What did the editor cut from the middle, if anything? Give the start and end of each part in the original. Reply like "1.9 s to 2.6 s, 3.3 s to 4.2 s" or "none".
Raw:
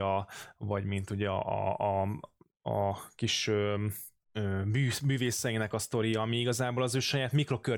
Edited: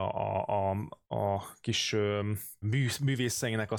2.4 s to 2.6 s, 4.2 s to 4.6 s